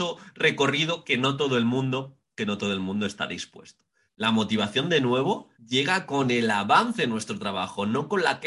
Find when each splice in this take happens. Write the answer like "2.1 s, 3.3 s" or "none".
4.1 s, 5.5 s